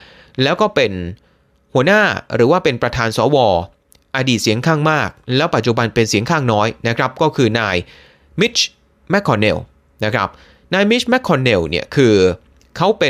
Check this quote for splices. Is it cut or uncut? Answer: uncut